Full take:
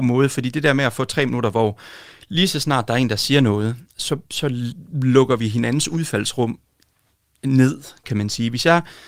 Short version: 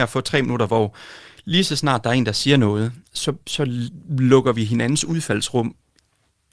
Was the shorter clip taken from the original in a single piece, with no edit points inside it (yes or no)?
yes